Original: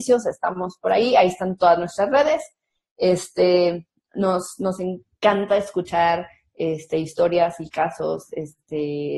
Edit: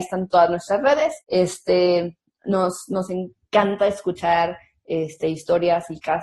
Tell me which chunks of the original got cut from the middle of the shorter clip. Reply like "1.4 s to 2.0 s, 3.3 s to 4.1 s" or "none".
2.5 s to 2.9 s